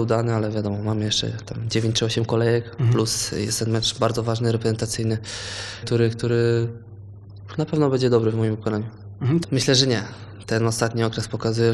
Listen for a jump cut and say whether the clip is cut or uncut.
cut